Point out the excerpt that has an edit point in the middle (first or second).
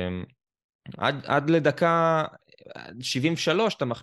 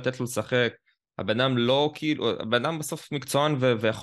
first